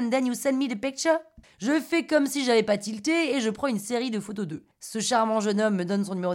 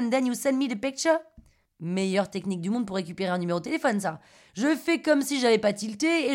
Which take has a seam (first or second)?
first